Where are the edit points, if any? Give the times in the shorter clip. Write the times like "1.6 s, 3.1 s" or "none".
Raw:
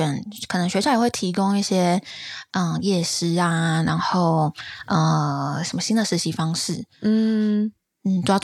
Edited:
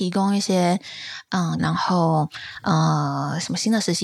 1.6 s

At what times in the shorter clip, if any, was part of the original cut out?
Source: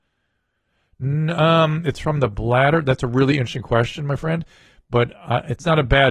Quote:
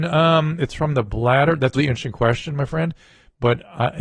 1.8 s

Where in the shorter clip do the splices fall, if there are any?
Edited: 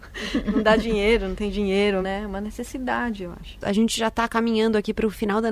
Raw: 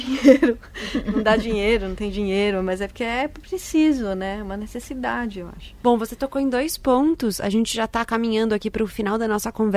2.0 s, 3.6 s

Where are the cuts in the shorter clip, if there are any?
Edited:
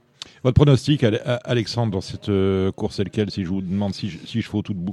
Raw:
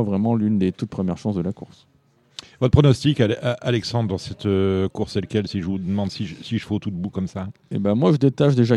none

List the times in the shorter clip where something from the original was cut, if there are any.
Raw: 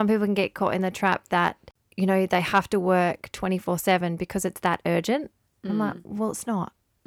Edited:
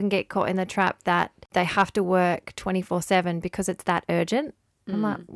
1.5 s

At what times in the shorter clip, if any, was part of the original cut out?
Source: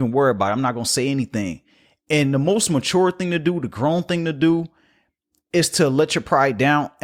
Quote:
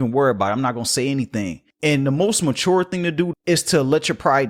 1.7 s, 3.3 s

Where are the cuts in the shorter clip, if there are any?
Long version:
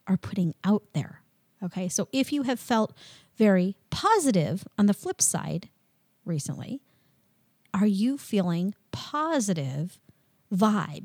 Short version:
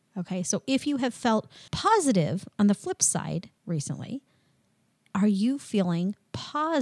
1.7 s, 3.6 s

